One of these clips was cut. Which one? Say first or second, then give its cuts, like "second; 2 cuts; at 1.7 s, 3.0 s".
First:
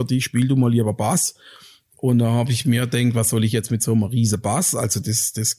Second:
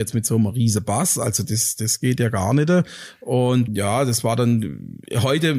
second; 1 cut; at 3.7 s